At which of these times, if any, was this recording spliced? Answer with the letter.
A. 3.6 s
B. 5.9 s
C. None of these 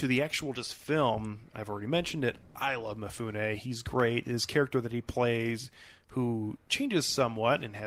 C